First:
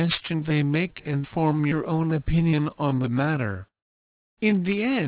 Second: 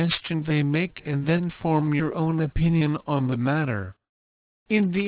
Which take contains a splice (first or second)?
first